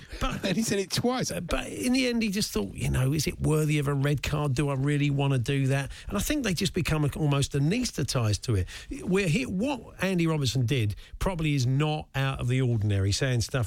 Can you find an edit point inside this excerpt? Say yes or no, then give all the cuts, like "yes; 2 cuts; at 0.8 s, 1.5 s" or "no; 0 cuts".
yes; 1 cut; at 1.3 s